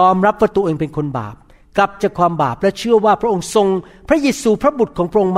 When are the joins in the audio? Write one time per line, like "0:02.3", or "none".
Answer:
0:02.0